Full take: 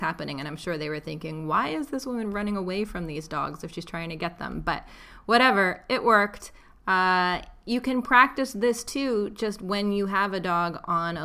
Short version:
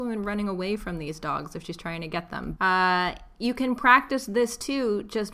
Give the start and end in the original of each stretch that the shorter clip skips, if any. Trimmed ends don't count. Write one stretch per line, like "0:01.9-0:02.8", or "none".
0:04.6-0:06.8